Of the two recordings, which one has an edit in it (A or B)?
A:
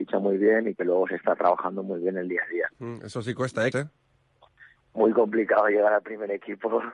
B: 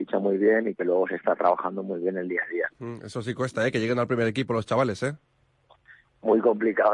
A